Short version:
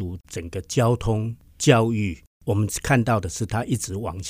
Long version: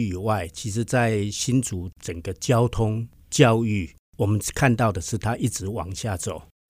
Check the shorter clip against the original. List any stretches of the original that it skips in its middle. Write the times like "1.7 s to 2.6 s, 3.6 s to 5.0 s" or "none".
none